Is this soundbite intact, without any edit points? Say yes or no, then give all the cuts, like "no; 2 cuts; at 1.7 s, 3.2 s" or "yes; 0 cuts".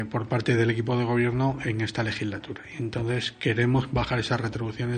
yes; 0 cuts